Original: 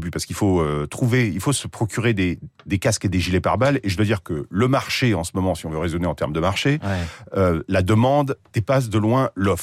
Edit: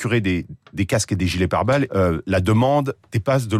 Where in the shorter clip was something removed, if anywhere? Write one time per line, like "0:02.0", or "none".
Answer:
0:01.9

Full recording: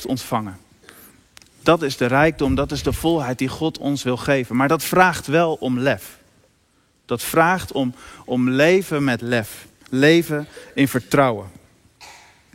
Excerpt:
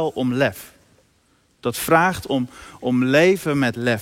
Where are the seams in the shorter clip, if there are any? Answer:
none

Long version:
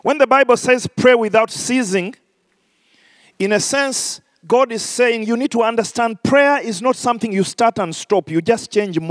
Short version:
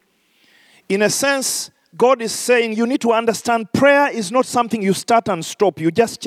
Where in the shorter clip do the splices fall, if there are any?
none

